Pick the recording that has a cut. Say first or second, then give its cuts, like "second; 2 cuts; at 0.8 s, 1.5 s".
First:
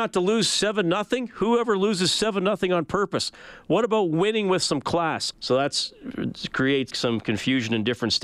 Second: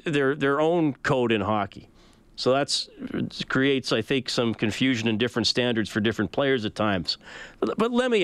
first; 2 cuts; at 5.3 s, 6.9 s